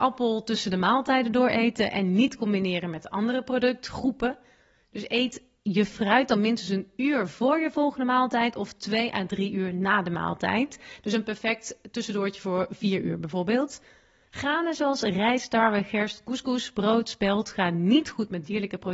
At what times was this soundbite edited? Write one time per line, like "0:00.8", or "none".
none